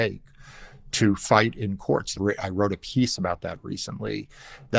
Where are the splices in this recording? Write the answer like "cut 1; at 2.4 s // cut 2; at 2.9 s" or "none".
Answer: cut 1; at 2.1 s